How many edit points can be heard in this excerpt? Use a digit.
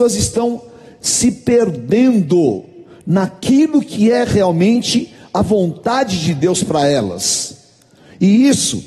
0